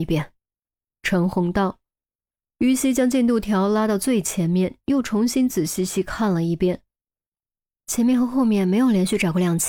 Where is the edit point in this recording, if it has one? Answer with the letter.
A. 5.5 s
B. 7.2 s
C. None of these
A